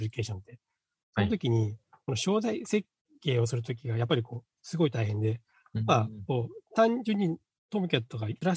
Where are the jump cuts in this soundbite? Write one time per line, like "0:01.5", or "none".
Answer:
none